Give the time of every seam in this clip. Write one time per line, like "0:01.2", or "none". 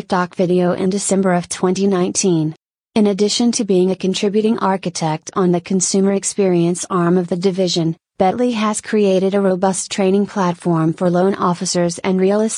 none